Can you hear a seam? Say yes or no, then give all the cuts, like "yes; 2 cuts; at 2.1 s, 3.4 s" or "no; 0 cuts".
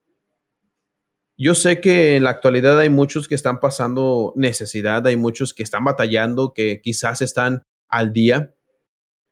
no; 0 cuts